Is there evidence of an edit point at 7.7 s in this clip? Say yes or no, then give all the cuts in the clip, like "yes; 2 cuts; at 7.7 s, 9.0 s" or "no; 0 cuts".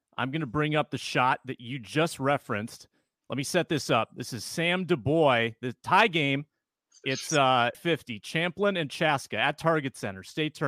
yes; 1 cut; at 7.7 s